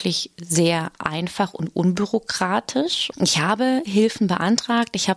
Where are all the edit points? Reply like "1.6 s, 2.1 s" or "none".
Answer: 3.1 s